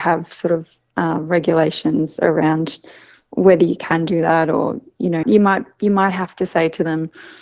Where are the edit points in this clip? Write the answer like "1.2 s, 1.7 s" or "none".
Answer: 5.2 s